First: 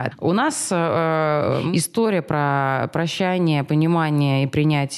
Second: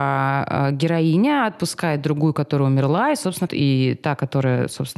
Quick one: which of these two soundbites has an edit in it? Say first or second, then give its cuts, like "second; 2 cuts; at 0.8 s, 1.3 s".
second; 1 cut; at 3.5 s